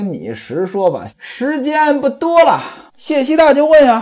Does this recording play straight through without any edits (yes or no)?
no